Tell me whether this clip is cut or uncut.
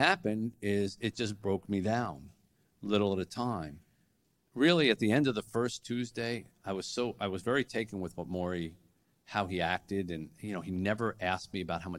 uncut